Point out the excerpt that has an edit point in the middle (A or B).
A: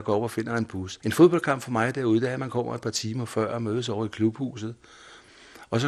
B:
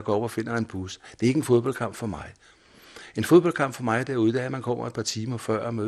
A